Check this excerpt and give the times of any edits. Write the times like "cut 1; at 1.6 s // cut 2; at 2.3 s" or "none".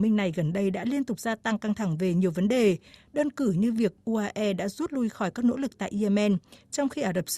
none